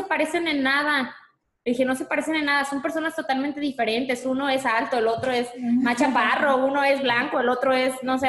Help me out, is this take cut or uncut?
uncut